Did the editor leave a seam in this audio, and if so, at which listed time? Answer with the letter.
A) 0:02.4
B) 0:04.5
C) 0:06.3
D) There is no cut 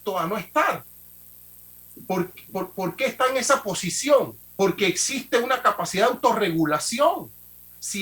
B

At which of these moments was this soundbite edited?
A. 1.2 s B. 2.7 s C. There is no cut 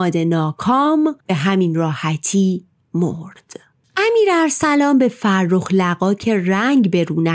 A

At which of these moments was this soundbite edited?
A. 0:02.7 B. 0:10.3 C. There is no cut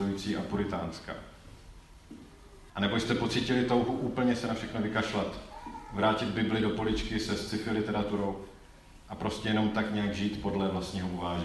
A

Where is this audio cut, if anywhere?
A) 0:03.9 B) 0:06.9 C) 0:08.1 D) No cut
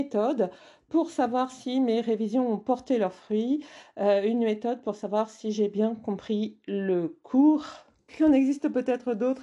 C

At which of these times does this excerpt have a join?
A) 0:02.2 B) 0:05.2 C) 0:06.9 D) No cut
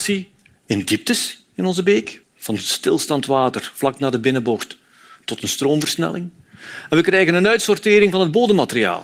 A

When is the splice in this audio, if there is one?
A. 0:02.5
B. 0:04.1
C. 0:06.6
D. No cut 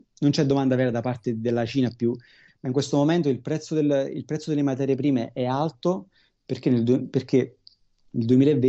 A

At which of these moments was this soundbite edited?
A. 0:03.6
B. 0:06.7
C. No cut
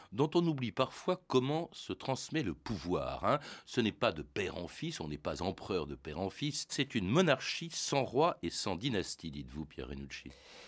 B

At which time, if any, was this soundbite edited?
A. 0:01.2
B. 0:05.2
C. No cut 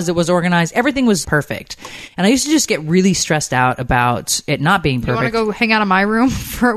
A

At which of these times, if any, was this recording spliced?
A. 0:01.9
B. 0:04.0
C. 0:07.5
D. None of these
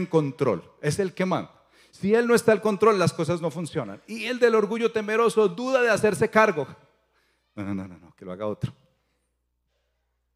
D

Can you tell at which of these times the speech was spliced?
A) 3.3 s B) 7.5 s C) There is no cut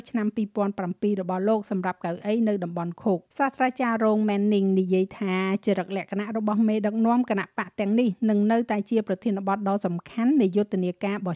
A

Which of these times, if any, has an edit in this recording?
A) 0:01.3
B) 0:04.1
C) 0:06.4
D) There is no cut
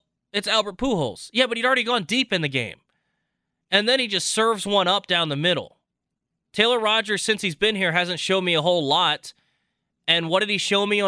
C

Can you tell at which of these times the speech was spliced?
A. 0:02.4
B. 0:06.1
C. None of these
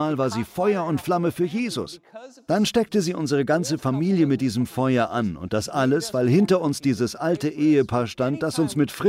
C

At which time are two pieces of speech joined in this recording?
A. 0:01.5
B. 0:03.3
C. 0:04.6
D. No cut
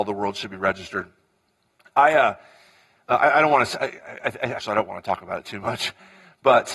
C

